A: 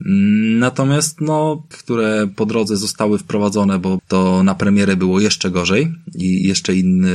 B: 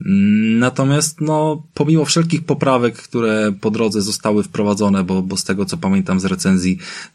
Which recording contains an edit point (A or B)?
A